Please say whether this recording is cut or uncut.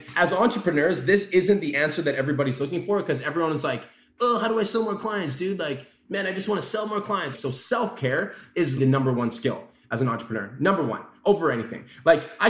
cut